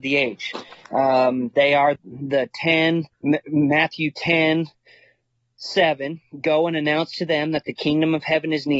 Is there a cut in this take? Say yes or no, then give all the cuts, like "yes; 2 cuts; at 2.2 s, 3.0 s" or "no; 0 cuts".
yes; 2 cuts; at 2.0 s, 3.1 s